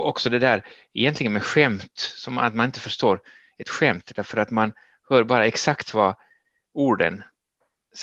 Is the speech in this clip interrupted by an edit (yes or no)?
no